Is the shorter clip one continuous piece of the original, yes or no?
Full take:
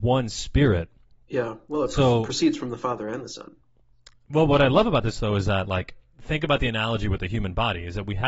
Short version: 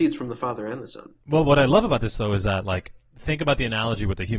no